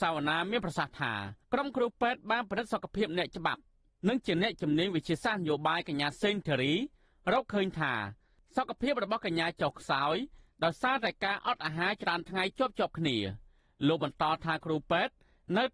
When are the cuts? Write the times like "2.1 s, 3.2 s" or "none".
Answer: 1.4 s